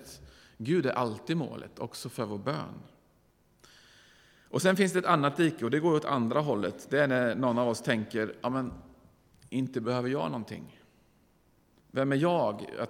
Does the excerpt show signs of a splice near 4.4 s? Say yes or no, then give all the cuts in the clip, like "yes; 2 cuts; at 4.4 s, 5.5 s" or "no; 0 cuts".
no; 1 cut; at 11.8 s